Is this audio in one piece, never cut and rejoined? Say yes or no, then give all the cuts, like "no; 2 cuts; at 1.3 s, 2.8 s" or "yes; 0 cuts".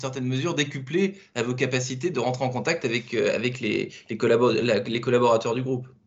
yes; 0 cuts